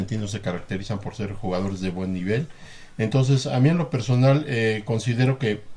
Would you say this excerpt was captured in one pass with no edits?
yes; 0 cuts

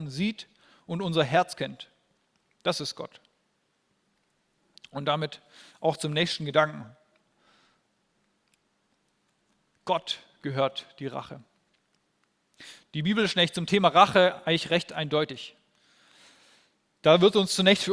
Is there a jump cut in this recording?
no; 0 cuts

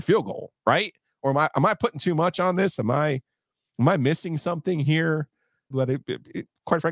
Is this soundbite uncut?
no; 1 cut; at 5.7 s

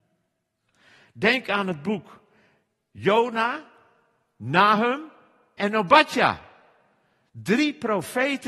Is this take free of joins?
yes; 0 cuts

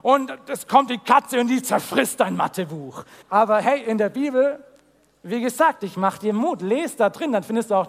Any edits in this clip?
yes; 1 cut; at 3.2 s

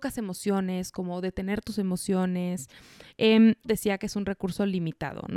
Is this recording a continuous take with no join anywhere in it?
no; 1 cut; at 3.6 s

